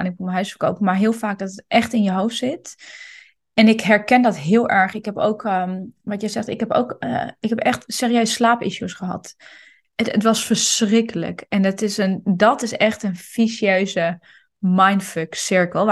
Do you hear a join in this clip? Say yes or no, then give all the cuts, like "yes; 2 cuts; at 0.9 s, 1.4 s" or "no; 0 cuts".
no; 0 cuts